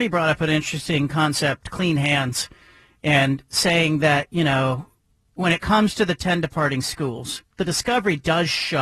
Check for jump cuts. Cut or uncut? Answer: uncut